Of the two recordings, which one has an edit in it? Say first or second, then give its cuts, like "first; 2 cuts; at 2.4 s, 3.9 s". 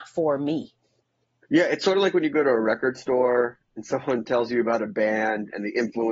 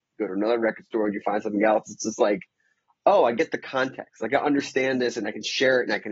first; 1 cut; at 1.4 s